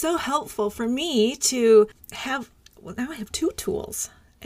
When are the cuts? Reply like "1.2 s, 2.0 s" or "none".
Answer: none